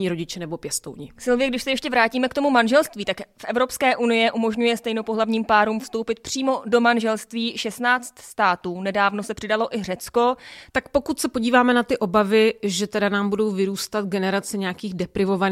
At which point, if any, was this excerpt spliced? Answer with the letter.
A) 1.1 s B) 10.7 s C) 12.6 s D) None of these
B